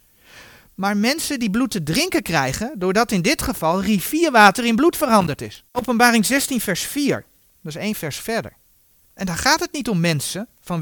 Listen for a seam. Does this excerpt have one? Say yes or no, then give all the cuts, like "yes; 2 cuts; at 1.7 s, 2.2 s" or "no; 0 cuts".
yes; 2 cuts; at 5.7 s, 8.9 s